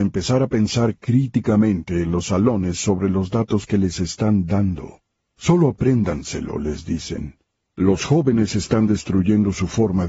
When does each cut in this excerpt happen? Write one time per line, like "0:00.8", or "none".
0:07.7

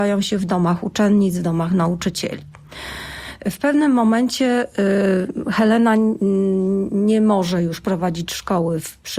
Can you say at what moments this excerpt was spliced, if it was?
none

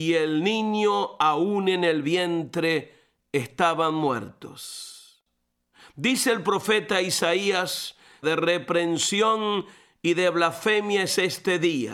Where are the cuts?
0:08.2

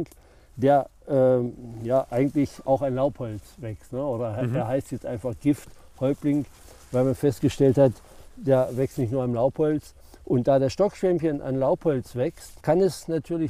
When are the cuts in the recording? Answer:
0:12.6

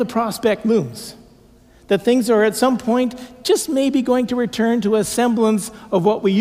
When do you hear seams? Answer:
none

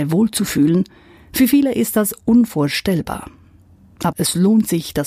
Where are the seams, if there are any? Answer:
0:04.1

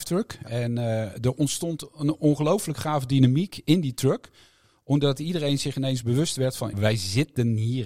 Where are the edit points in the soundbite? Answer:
0:06.7

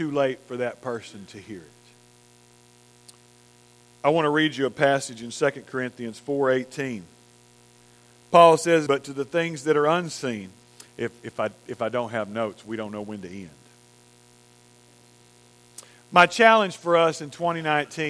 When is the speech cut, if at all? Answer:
0:08.9
0:10.9

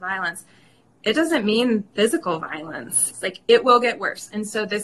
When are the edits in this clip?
0:03.1

